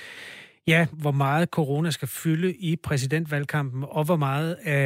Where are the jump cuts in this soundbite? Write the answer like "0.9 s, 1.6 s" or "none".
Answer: 0.9 s